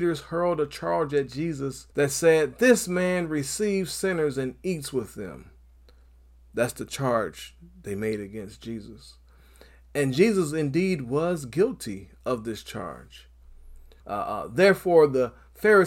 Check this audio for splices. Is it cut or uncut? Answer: cut